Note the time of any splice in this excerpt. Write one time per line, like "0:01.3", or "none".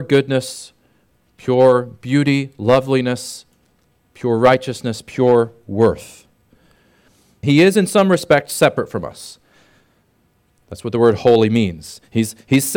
0:07.4